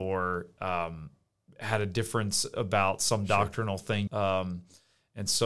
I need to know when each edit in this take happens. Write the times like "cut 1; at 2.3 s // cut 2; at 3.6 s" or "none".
cut 1; at 4.1 s